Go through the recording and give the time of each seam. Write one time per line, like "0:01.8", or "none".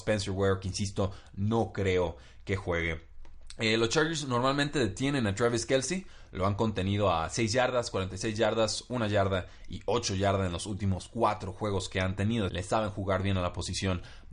0:12.5